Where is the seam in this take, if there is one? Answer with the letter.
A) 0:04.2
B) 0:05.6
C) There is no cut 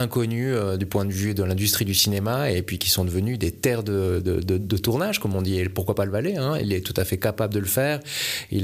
C